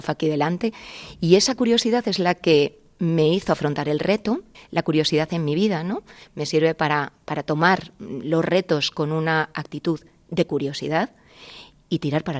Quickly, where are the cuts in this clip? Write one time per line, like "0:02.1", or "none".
0:04.5